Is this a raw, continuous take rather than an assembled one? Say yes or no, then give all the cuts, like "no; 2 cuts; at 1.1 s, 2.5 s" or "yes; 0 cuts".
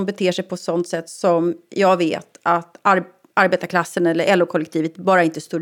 yes; 0 cuts